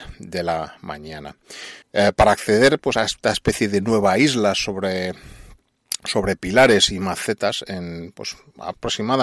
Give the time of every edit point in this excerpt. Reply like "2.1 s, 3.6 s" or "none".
1.8 s